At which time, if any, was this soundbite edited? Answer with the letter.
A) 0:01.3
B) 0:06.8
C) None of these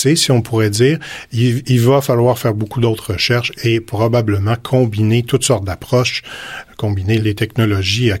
C